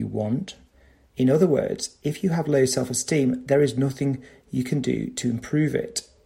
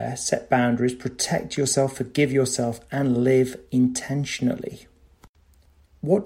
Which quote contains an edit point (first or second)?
first